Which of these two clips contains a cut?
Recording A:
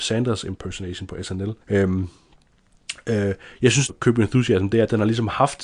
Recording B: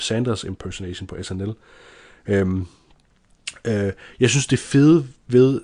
A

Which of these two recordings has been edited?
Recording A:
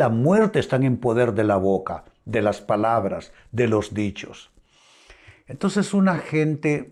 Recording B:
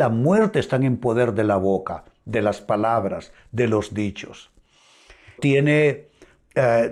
B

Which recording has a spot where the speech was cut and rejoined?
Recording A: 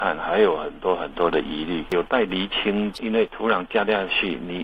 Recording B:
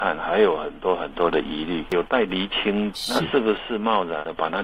A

